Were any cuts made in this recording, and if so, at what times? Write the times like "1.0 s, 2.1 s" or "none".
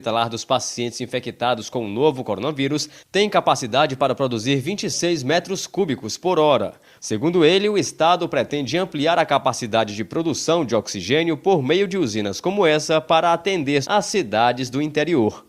7.0 s, 13.8 s

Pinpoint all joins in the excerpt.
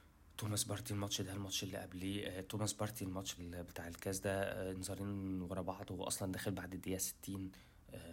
3.4 s

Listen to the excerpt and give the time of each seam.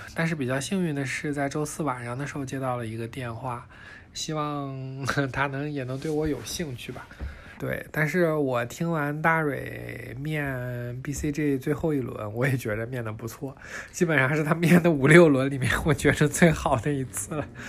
4.1 s, 7.6 s

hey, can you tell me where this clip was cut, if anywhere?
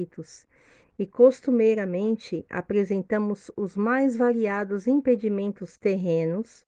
none

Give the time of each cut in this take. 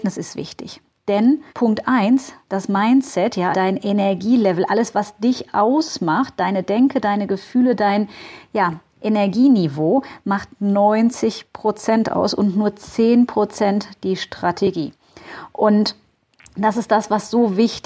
1.5 s, 3.5 s

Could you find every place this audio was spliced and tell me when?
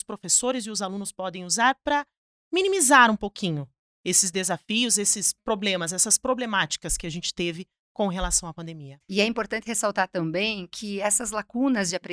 9.0 s

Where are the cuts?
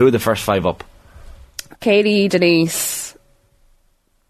1.7 s

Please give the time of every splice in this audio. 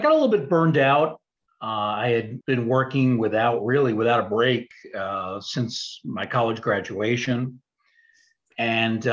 2.4 s

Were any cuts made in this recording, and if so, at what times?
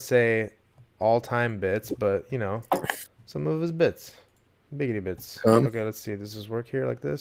none

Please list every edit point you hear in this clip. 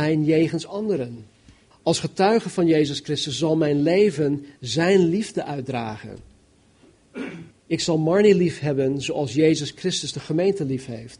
1.7 s, 7.5 s

